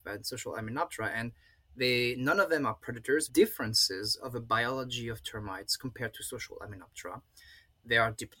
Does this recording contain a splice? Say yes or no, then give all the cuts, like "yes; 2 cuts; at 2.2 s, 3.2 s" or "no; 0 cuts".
yes; 1 cut; at 3.3 s